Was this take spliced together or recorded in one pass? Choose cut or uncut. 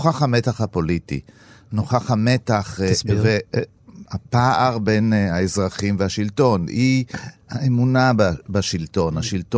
uncut